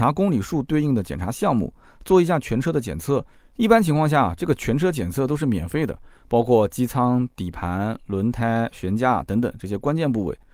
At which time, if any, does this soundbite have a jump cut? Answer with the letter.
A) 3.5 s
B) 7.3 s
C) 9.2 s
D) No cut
D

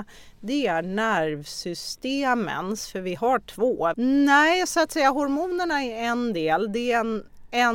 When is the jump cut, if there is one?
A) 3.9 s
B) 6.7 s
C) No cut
A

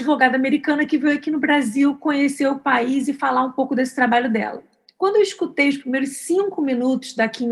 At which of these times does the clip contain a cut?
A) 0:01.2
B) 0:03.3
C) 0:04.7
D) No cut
D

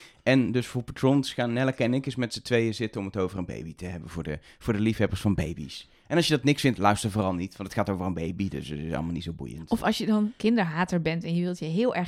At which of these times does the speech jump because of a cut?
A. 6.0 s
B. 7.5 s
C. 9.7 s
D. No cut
D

